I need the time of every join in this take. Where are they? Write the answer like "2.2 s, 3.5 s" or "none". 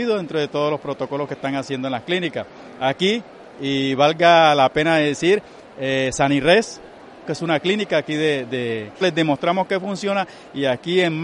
7.2 s, 9.0 s